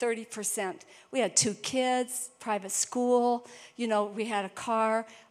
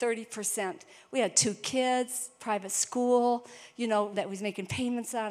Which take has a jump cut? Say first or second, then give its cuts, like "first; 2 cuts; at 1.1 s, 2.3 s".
second; 1 cut; at 4.1 s